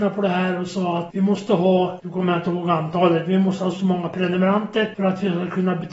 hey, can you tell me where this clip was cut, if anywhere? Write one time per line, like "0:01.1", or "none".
0:03.7